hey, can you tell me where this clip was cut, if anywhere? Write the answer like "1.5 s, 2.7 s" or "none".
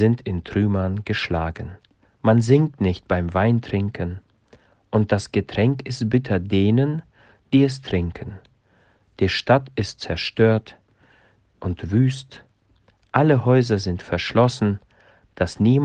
2.1 s